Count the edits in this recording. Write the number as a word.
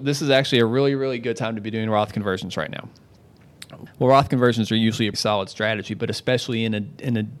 two